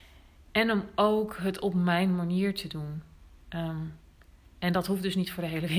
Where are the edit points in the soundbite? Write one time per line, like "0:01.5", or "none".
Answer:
none